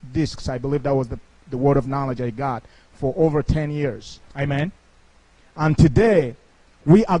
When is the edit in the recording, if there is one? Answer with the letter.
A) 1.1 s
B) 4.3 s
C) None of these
B